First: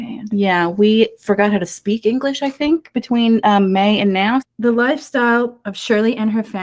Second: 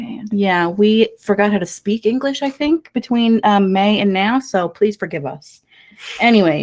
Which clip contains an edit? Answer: first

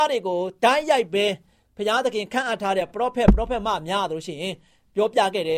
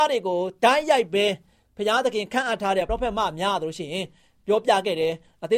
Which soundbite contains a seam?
second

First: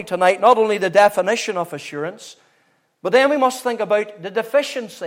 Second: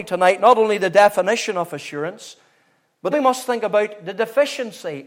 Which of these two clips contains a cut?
second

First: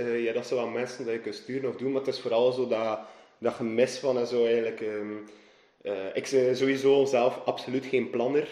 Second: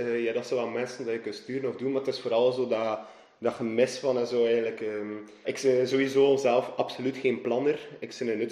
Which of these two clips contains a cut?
second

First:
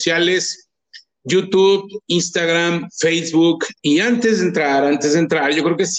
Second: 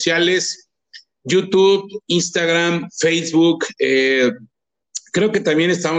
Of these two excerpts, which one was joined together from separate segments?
first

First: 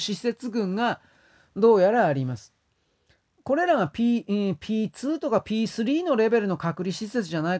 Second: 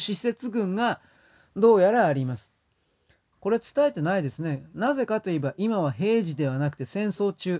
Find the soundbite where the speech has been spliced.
second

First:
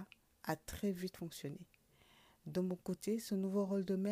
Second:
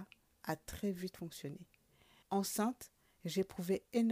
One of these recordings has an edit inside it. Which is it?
second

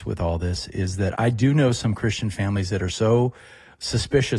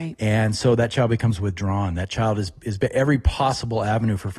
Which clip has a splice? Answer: first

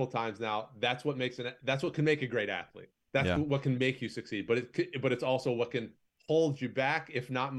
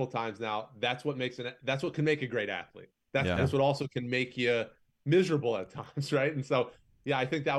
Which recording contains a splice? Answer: second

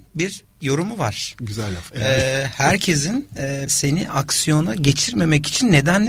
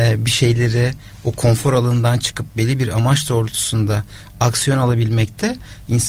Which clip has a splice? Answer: first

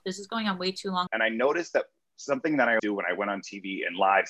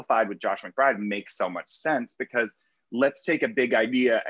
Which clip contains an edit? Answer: first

